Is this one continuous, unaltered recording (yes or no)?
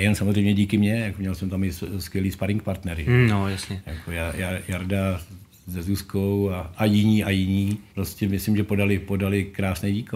no